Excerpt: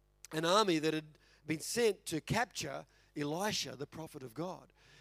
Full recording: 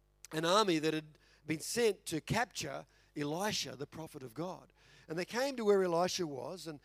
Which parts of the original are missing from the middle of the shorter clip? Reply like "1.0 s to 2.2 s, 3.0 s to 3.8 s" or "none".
none